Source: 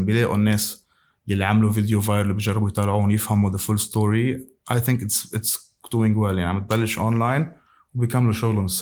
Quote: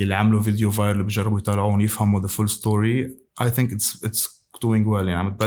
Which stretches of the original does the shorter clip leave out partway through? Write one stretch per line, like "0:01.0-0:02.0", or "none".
none